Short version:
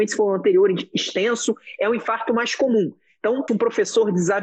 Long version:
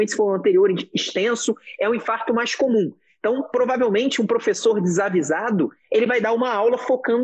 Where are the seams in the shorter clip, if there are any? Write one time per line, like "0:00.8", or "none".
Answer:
0:03.5